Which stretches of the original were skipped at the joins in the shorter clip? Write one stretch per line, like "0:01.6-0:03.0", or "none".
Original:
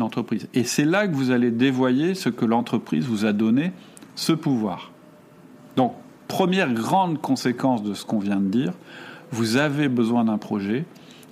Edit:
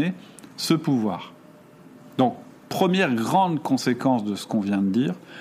none